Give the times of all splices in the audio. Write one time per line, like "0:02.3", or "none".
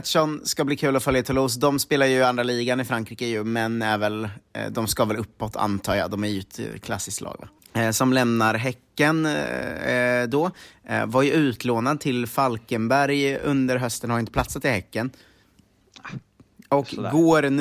0:07.6